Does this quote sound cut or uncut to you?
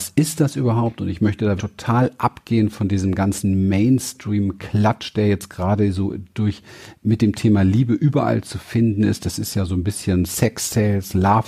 cut